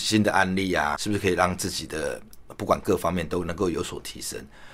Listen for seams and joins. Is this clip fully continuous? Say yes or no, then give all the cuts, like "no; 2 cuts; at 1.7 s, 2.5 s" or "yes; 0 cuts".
no; 1 cut; at 1.0 s